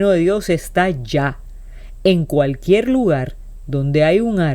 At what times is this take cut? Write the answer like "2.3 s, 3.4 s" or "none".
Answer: none